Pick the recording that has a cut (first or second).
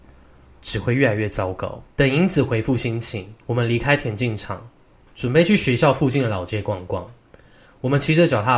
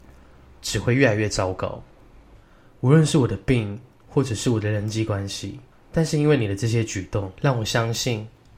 first